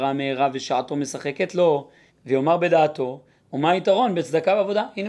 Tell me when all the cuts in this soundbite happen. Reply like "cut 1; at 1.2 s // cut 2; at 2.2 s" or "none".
cut 1; at 2.1 s // cut 2; at 3.4 s